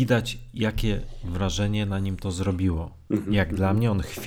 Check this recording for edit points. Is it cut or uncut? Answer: uncut